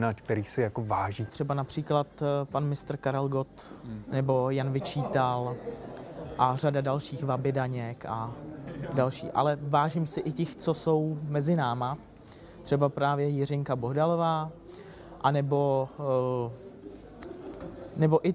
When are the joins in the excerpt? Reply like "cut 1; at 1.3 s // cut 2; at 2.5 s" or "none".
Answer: cut 1; at 1.3 s // cut 2; at 4.0 s